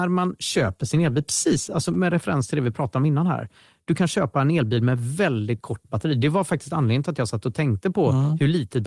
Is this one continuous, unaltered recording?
yes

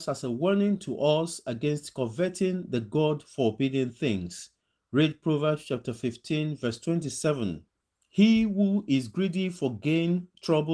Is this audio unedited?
yes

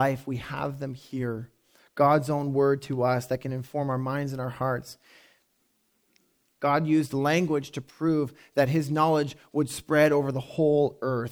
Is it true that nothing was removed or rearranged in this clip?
no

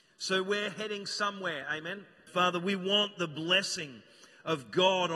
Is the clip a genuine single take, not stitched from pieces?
no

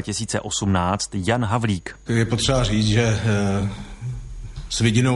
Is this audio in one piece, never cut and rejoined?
yes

